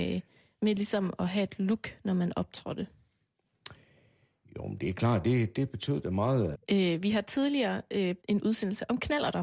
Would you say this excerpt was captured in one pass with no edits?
no; 2 cuts; at 6.5 s, 8.2 s

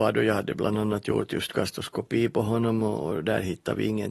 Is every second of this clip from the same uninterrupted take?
yes; 0 cuts

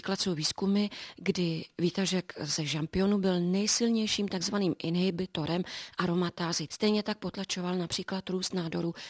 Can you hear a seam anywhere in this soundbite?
yes; 1 cut; at 6.7 s

